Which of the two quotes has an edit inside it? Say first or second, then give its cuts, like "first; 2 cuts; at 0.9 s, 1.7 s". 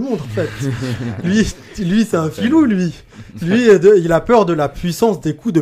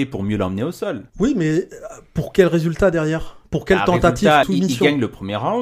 second; 2 cuts; at 1.1 s, 4.4 s